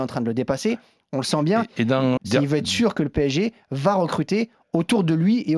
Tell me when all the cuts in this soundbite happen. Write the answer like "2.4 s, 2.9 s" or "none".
2.2 s